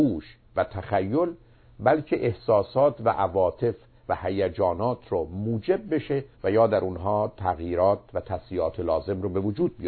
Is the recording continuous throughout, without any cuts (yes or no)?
no